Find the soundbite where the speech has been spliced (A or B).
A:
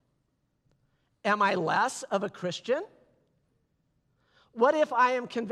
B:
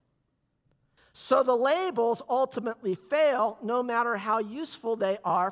B